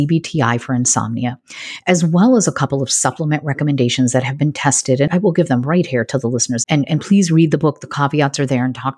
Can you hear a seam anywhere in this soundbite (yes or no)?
yes